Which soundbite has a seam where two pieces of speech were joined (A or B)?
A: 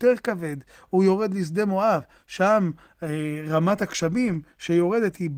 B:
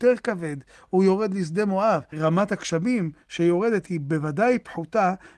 B